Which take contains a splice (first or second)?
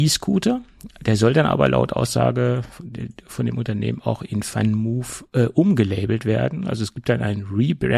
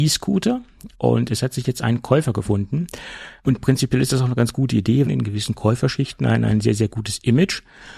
second